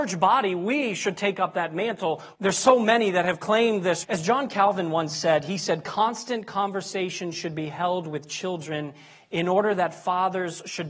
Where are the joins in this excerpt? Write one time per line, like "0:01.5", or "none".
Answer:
0:02.3
0:04.0